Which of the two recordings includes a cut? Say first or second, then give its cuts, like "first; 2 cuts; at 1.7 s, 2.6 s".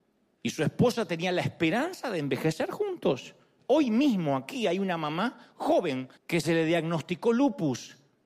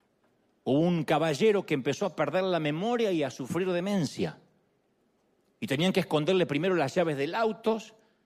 first; 2 cuts; at 3.6 s, 6.2 s